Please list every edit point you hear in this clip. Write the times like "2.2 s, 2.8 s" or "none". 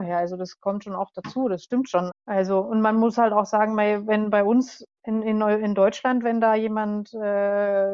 2.1 s